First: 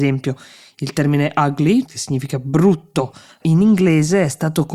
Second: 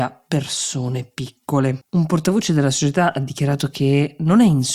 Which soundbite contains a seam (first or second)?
second